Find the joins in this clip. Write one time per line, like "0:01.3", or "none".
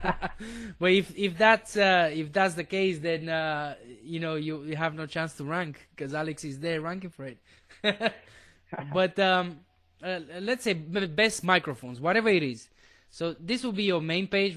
none